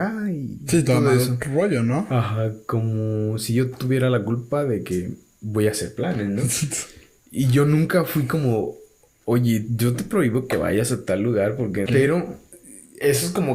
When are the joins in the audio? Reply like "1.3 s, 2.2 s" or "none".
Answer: 11.9 s